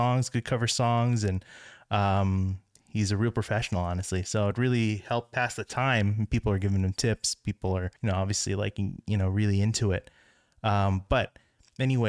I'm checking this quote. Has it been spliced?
yes; 1 cut; at 8.0 s

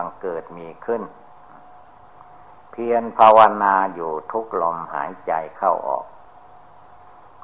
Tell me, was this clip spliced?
no; 0 cuts

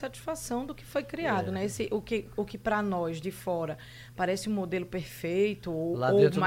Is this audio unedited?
yes; 0 cuts

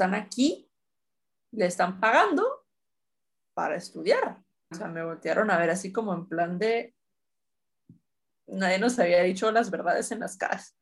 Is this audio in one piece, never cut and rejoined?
no; 1 cut; at 4.7 s

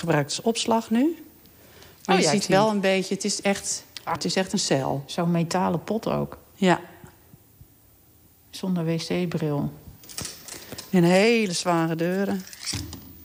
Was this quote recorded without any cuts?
no; 1 cut; at 4.2 s

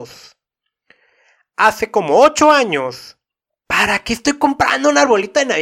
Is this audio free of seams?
no; 1 cut; at 3.6 s

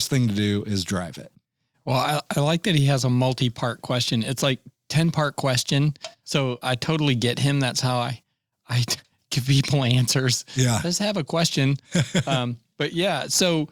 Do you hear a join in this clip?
yes; 1 cut; at 6.6 s

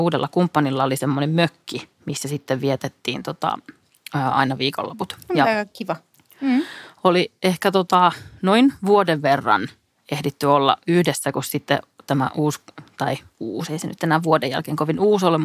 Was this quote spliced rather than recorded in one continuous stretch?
no; 0 cuts

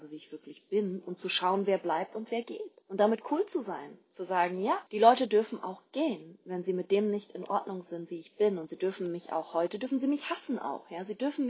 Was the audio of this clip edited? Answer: yes; 2 cuts; at 2.8 s, 4.9 s

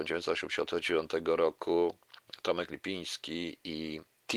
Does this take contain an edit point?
no; 0 cuts

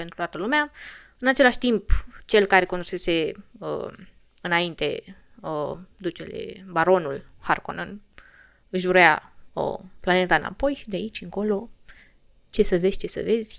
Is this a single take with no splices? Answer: yes; 0 cuts

